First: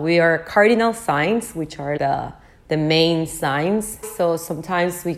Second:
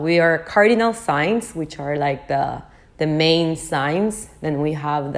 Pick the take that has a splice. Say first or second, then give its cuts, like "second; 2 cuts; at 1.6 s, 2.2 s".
first; 2 cuts; at 2.0 s, 4.0 s